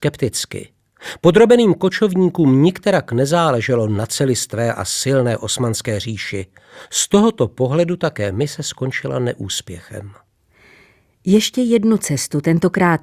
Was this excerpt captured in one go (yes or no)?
yes